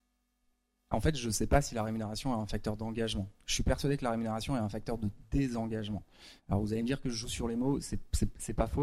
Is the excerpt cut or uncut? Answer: uncut